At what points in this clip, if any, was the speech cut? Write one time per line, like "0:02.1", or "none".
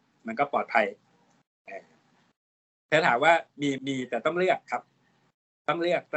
0:03.8